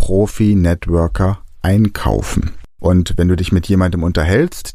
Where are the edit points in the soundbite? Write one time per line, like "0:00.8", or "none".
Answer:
0:02.8